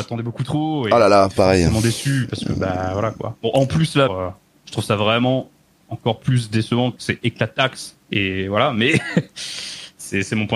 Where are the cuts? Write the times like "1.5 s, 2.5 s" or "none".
4.1 s, 8.0 s